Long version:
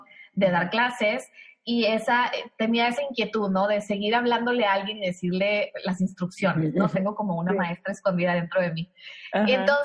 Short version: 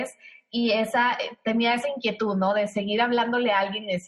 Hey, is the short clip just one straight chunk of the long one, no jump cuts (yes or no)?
yes